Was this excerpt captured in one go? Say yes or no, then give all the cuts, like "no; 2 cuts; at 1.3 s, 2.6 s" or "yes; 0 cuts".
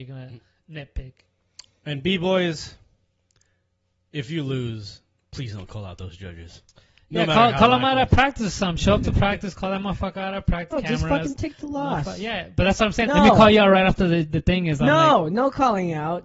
no; 2 cuts; at 10.7 s, 13.1 s